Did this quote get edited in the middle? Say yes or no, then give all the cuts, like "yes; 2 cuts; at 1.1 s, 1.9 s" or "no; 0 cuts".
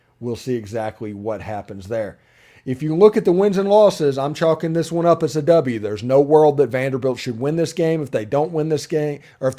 no; 0 cuts